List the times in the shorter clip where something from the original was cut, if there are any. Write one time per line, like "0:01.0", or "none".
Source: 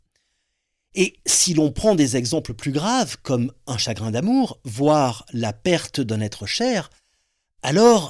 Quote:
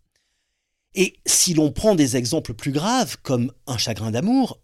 none